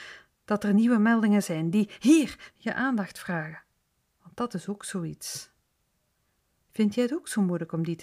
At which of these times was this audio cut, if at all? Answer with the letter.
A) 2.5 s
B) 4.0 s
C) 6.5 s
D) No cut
A